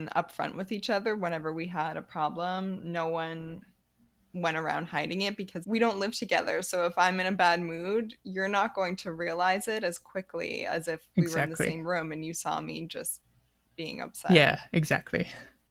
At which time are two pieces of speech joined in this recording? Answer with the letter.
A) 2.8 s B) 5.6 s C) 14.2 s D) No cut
B